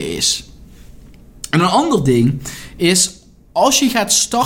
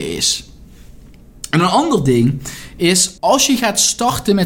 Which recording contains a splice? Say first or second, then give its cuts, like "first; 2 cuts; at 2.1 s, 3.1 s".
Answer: second; 1 cut; at 3.2 s